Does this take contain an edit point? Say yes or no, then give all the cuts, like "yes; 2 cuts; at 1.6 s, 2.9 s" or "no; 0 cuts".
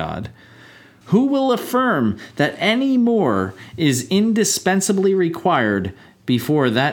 yes; 1 cut; at 1.0 s